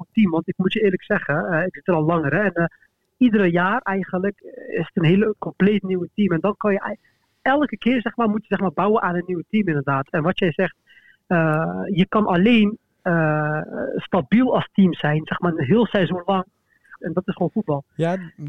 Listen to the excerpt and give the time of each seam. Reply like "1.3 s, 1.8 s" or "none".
17.0 s